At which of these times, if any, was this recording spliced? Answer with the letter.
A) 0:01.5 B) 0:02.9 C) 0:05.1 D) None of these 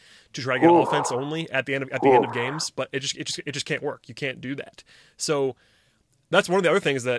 D